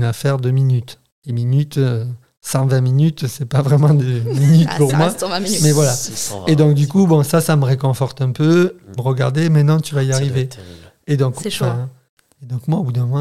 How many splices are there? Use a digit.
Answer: 1